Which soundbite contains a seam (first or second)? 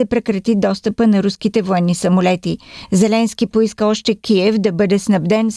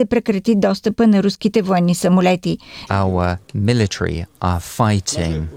second